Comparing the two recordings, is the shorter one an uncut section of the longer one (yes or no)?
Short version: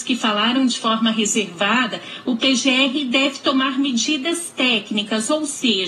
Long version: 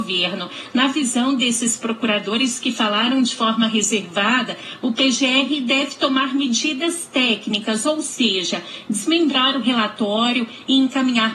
yes